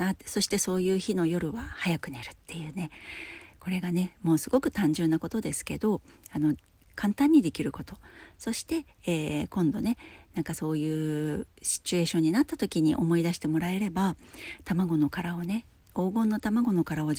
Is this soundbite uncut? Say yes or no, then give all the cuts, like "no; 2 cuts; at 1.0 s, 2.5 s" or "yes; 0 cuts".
no; 1 cut; at 11.5 s